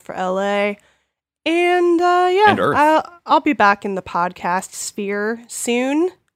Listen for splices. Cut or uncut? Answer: uncut